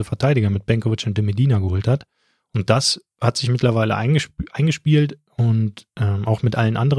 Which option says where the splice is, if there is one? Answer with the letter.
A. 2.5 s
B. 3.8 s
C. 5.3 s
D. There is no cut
C